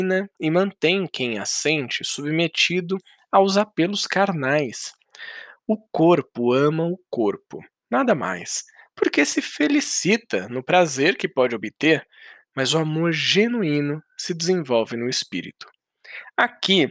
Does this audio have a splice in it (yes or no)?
no